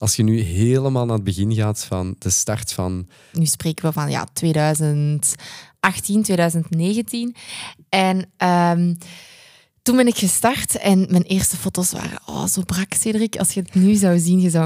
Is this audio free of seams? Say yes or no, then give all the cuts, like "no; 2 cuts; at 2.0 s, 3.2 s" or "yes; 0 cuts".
no; 1 cut; at 3.3 s